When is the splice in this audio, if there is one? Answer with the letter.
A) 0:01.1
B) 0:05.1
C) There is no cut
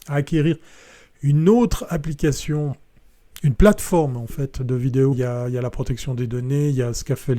B